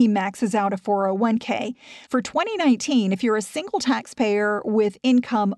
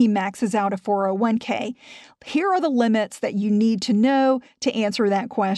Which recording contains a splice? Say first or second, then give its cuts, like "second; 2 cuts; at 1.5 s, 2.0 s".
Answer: first; 1 cut; at 2.1 s